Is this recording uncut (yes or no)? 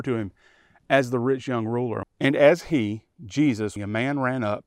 no